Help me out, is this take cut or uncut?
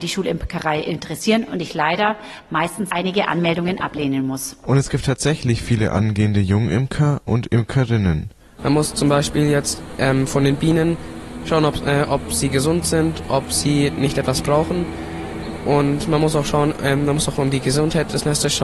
cut